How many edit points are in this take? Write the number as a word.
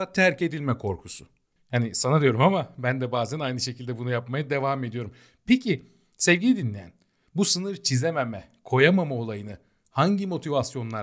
one